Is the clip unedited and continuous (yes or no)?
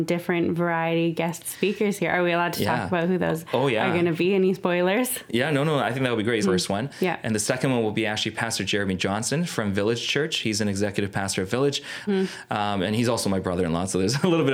no